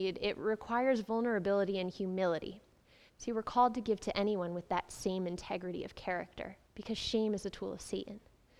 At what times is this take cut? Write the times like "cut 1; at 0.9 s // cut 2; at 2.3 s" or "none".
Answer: cut 1; at 3.1 s // cut 2; at 6.6 s